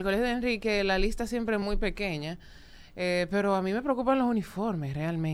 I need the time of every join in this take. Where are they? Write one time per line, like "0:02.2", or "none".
none